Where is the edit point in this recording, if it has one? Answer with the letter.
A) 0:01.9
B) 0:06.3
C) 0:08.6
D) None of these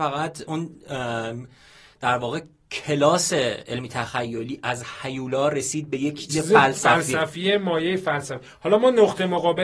B